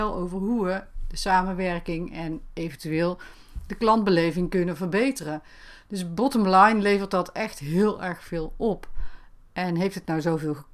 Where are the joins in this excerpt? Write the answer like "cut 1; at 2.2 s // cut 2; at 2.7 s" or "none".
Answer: none